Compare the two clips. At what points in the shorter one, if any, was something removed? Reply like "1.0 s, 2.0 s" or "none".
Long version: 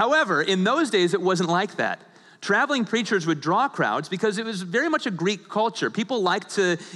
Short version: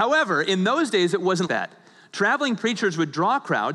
1.5 s